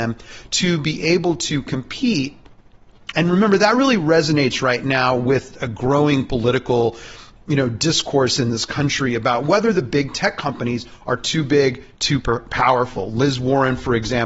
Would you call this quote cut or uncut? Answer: cut